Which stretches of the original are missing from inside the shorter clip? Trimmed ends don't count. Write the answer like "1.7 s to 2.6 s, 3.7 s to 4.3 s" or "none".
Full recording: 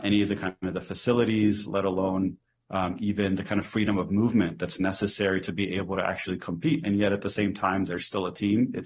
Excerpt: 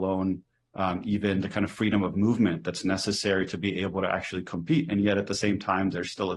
none